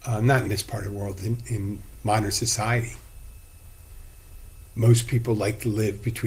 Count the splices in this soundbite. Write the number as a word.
zero